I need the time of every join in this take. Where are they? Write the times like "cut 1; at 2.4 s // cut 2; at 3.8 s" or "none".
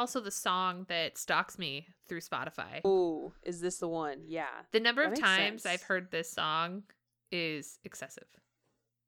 cut 1; at 2.8 s